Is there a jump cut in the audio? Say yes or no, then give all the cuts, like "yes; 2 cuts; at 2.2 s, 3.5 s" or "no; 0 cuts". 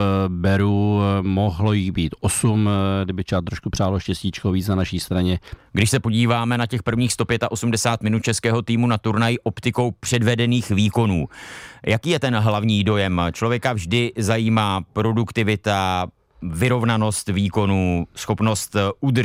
yes; 1 cut; at 5.6 s